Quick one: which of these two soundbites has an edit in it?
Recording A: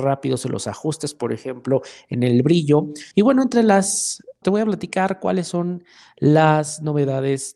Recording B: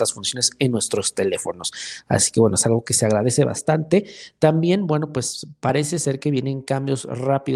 A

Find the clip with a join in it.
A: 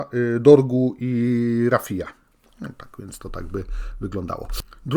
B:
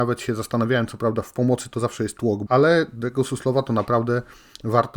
B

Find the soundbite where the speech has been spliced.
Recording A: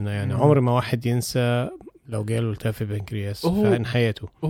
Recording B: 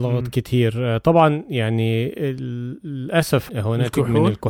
B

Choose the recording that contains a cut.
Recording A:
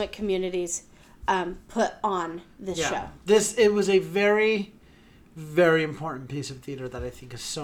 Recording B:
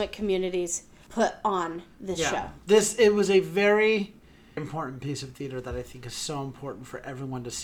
B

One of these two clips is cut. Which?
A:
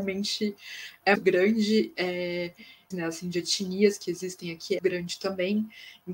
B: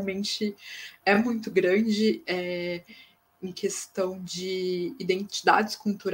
A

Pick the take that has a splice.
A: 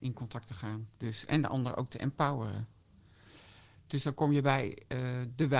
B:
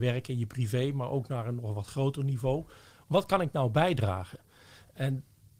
A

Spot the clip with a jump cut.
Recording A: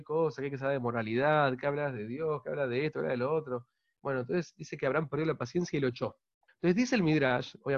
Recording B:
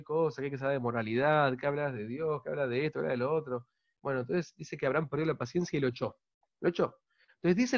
A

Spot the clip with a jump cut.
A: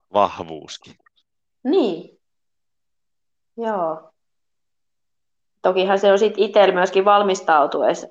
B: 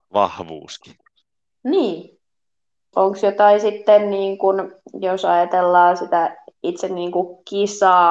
B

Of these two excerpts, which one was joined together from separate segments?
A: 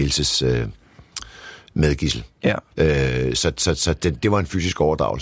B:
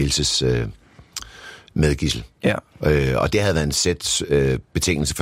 A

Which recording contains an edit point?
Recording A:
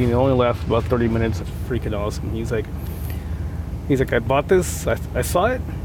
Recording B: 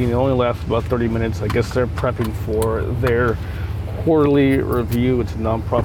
A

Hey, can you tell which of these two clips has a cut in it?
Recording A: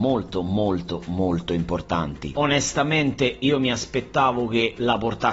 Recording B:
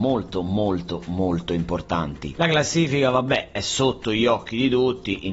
A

